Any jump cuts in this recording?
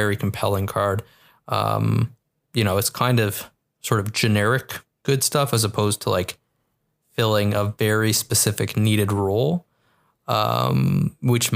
no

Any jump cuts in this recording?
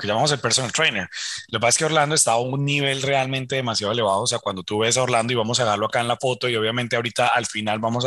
no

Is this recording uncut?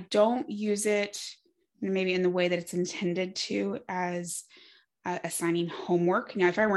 yes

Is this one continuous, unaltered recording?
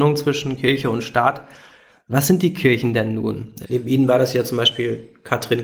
no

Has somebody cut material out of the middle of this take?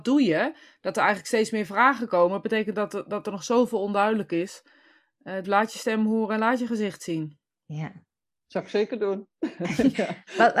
yes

